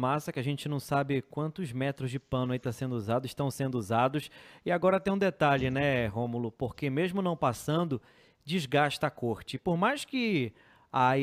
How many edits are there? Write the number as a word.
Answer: zero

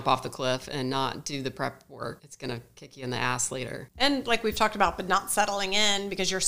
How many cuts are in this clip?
one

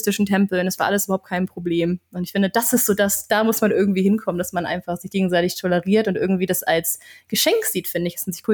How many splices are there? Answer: zero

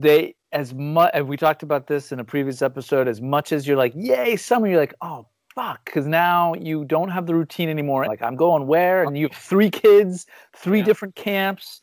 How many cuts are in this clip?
one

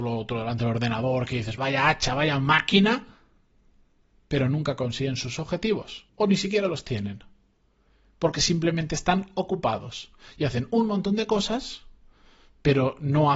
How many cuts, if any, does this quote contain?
two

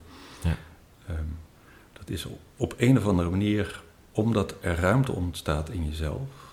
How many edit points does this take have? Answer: zero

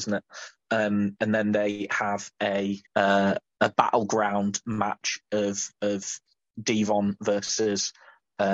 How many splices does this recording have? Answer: one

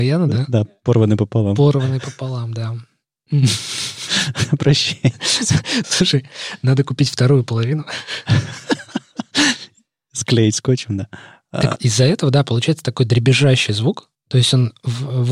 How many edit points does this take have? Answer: one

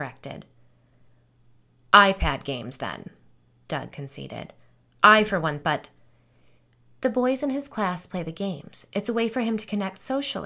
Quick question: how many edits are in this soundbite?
one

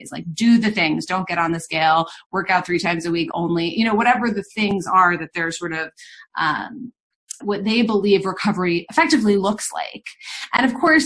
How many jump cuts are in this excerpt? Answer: one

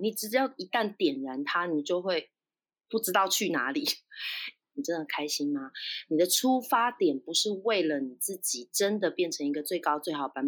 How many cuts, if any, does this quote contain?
one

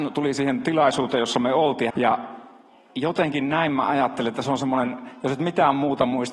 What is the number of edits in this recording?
one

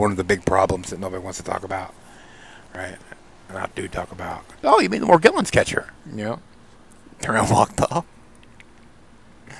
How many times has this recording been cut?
two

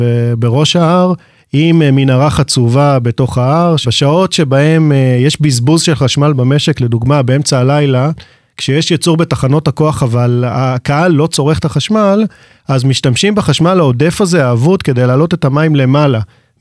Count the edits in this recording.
one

